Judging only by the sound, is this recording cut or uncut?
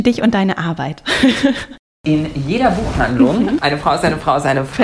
uncut